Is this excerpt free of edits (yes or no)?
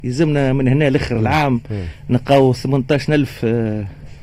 yes